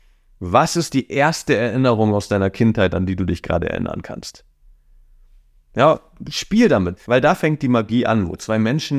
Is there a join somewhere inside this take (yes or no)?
yes